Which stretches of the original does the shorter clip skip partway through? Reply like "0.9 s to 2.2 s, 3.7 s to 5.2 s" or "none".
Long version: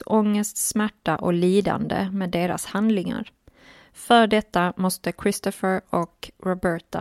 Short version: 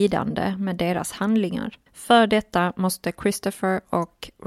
3.4 s to 3.9 s